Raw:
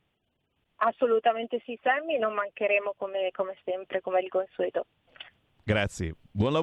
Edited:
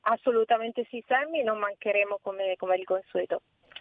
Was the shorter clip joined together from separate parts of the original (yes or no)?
yes